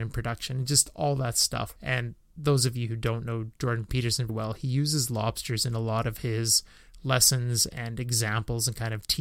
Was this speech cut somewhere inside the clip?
yes; 2 cuts; at 1.8 s, 4.3 s

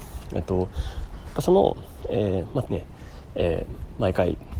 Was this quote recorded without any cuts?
no; 1 cut; at 2.7 s

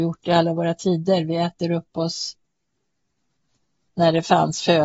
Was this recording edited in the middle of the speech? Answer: no; 0 cuts

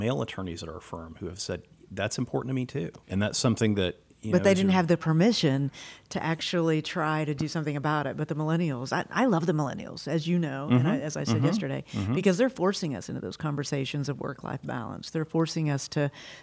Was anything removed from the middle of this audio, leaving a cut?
yes; 1 cut; at 3.0 s

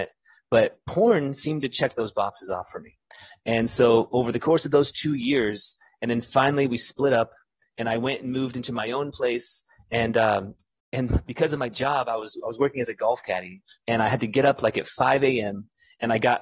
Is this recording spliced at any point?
no; 0 cuts

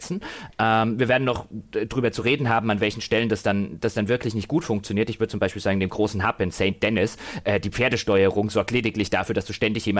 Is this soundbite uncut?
yes; 0 cuts

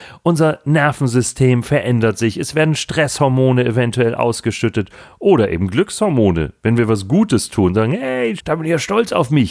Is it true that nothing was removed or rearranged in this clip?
no; 1 cut; at 8.4 s

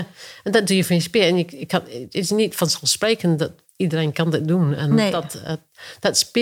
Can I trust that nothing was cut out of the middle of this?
yes; 0 cuts

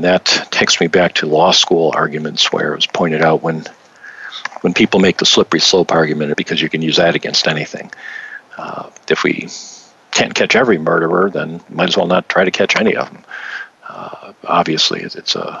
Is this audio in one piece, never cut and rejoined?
no; 1 cut; at 6.3 s

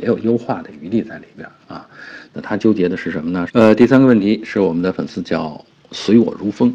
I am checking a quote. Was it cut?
yes; 2 cuts; at 2.3 s, 3.5 s

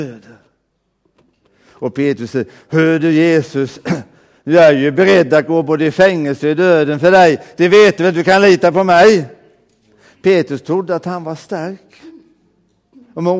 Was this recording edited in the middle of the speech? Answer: no; 0 cuts

